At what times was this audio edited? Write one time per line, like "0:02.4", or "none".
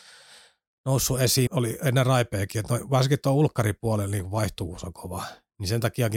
0:01.5